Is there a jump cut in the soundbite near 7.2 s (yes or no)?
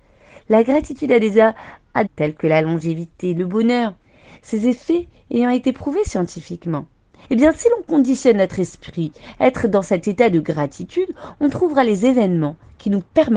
yes